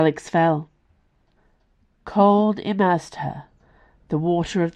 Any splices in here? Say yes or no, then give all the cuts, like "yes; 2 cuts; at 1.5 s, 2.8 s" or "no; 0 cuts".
no; 0 cuts